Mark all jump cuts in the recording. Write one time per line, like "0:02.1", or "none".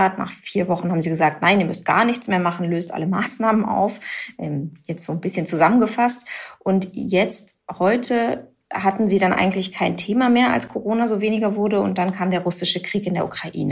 none

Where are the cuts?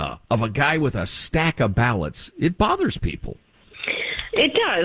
none

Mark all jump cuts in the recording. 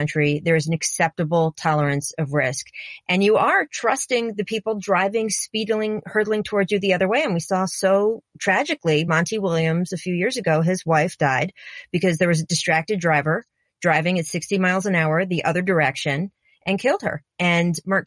none

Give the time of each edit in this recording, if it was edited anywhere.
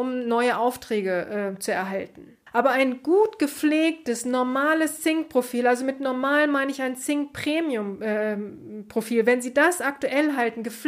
0:02.5

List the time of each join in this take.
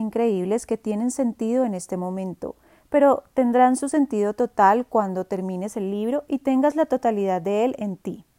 none

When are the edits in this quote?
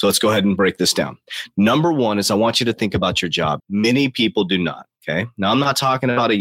0:03.6

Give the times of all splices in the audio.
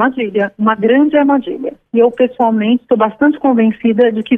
0:01.9

